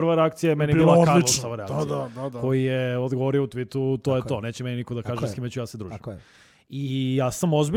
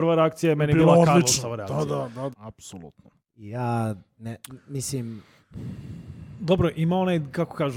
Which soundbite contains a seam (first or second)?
second